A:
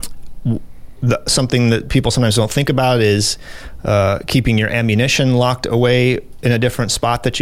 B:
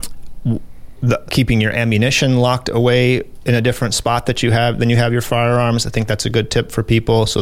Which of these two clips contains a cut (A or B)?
B